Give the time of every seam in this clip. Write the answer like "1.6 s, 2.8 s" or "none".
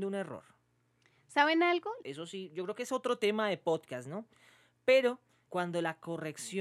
2.0 s, 5.5 s